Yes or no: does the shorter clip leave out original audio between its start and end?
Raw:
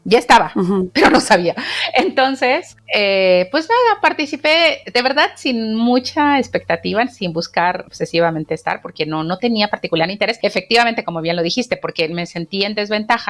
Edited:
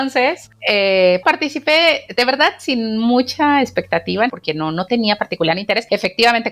yes